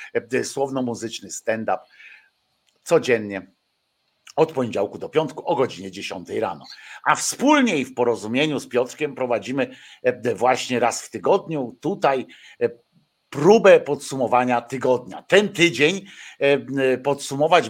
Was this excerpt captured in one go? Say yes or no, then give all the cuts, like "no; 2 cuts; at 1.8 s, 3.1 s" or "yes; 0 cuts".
yes; 0 cuts